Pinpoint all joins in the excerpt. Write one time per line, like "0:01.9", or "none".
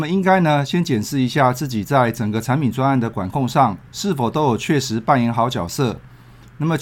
0:03.9

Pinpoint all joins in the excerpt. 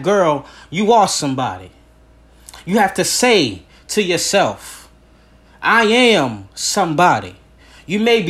none

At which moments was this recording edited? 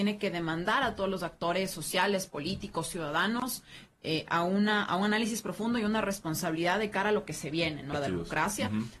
0:07.9

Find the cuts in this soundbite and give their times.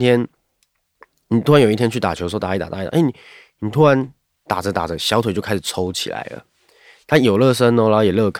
0:07.0

